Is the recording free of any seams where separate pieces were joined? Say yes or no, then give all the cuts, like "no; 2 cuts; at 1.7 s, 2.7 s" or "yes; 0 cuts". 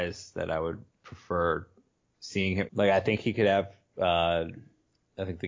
no; 1 cut; at 2.6 s